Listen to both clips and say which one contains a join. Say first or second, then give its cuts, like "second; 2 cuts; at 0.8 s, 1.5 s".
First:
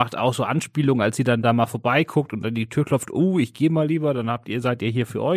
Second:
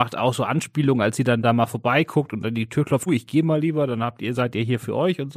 second; 1 cut; at 3.1 s